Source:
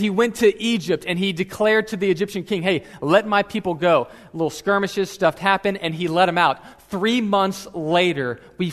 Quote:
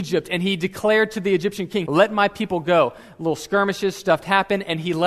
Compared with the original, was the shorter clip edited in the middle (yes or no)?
yes